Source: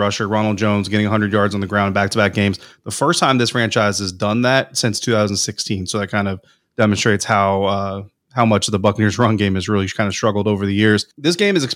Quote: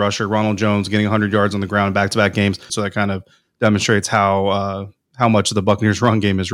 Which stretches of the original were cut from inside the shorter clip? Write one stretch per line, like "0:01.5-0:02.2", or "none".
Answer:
0:02.7-0:05.9